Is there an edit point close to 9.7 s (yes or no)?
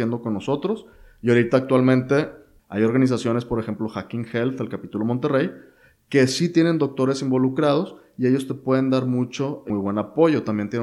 yes